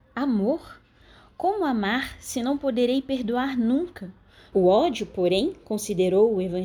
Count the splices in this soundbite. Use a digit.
1